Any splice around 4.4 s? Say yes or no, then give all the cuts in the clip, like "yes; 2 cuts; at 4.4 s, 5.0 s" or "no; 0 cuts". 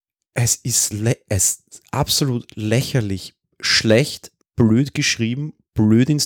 yes; 1 cut; at 4.4 s